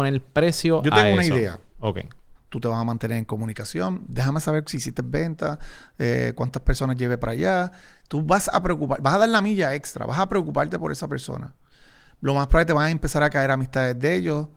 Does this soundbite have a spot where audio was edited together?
yes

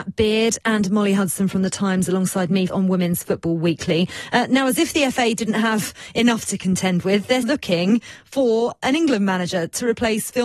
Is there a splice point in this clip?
yes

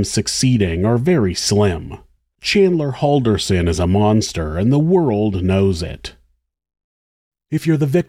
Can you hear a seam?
no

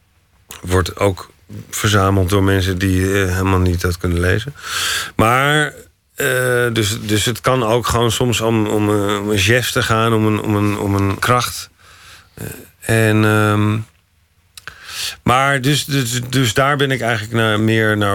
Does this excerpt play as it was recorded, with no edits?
no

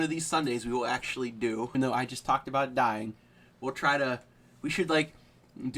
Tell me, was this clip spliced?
yes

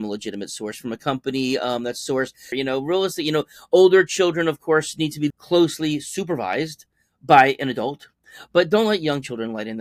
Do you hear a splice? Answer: yes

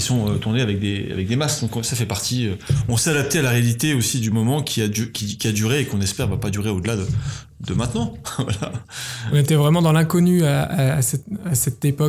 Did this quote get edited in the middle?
no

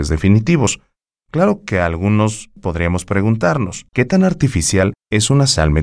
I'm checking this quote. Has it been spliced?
yes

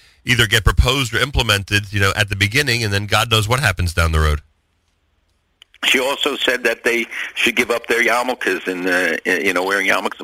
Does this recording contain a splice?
no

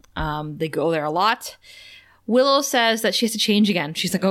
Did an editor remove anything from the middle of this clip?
no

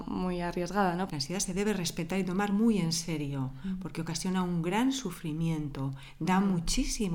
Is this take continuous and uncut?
no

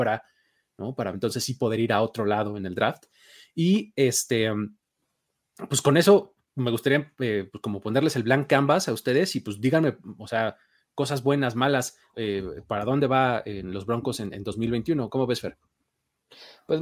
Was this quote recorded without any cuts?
no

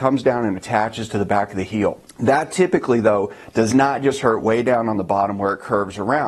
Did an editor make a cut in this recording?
no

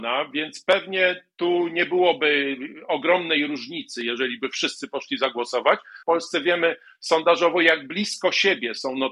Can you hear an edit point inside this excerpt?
yes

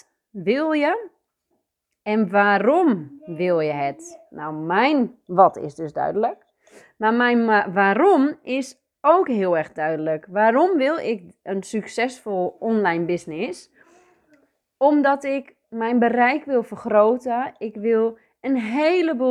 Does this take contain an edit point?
no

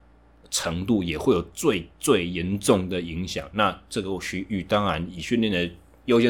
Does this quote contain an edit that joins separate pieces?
no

